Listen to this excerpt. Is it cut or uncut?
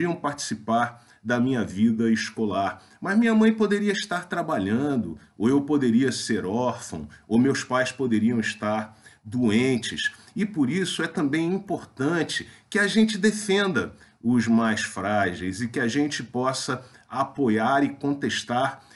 uncut